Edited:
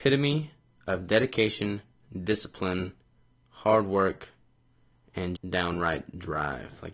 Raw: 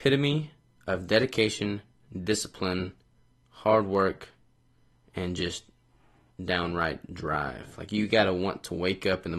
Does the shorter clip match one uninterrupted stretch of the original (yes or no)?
no